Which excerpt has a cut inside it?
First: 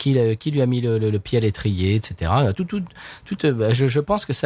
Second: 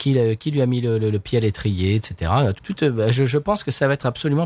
second; 1 cut; at 2.6 s

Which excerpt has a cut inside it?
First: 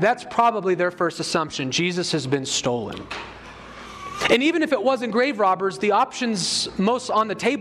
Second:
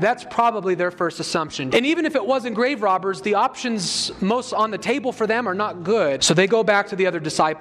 second; 2 cuts; at 1.7 s, 6.2 s

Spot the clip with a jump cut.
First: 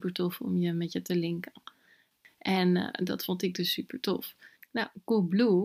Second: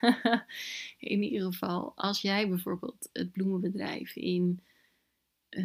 first; 1 cut; at 4.6 s

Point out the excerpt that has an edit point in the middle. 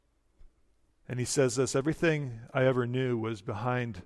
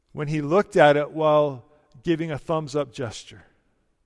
first; 1 cut; at 0.9 s

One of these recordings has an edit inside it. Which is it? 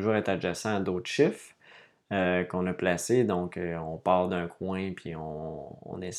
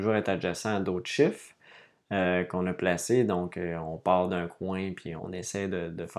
second; 1 cut; at 5.2 s

